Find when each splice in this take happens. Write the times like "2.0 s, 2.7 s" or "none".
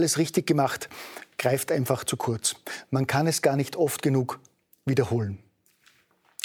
none